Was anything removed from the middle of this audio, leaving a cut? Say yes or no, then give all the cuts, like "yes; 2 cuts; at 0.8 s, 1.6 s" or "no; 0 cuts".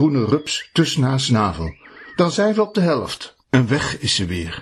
yes; 1 cut; at 3.4 s